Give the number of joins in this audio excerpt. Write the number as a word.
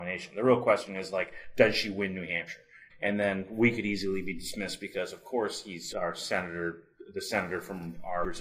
two